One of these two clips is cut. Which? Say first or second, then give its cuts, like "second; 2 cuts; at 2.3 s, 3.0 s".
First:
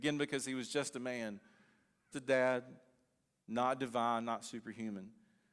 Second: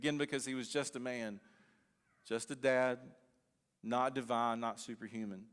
first; 1 cut; at 2.1 s